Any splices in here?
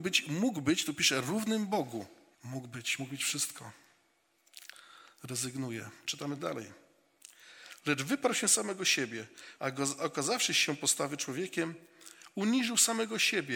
yes; 2 cuts; at 2.3 s, 9.6 s

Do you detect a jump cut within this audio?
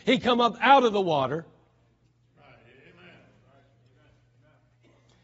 no; 0 cuts

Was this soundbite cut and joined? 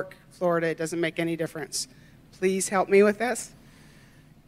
no; 0 cuts

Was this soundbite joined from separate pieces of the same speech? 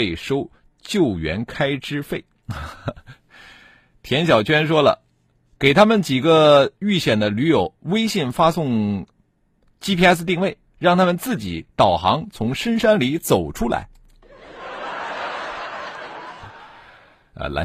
no; 0 cuts

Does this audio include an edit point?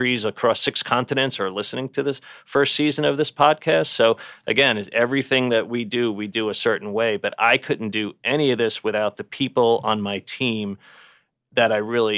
no; 0 cuts

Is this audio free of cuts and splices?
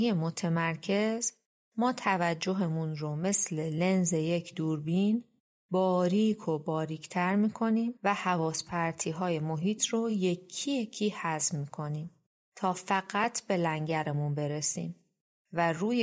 yes; 0 cuts

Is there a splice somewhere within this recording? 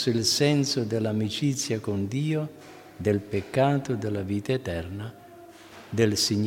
no; 0 cuts

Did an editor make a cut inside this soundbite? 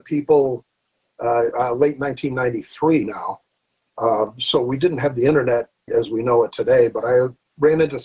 yes; 2 cuts; at 1.5 s, 5.9 s

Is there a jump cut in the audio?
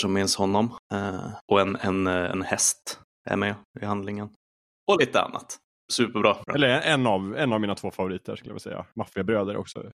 yes; 1 cut; at 6.5 s

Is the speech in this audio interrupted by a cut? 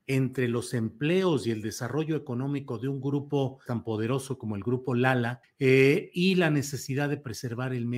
yes; 2 cuts; at 3.7 s, 5.4 s

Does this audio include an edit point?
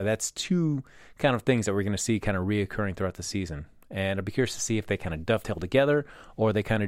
no; 0 cuts

